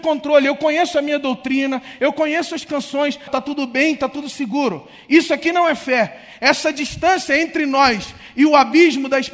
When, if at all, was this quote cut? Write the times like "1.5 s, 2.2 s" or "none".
3.3 s